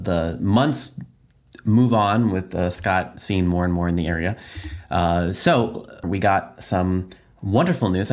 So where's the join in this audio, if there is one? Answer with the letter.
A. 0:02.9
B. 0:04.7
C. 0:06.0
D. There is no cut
C